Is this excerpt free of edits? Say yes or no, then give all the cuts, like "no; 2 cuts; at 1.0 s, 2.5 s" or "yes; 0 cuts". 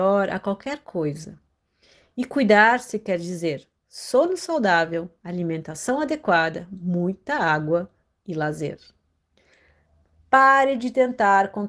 yes; 0 cuts